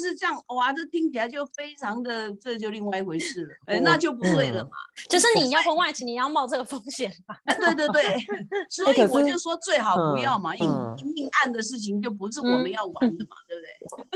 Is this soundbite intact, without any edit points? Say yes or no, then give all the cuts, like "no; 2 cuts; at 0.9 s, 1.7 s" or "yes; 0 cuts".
no; 3 cuts; at 3.6 s, 7.6 s, 10.6 s